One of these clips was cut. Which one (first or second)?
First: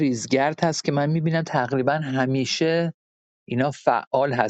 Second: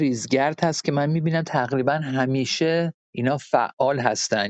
second